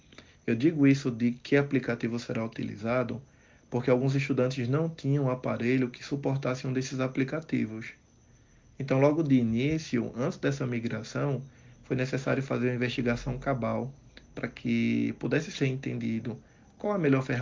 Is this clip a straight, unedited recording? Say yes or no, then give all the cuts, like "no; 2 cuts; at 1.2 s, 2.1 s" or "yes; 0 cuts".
yes; 0 cuts